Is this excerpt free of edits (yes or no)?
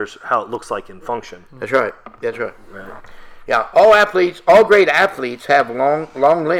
yes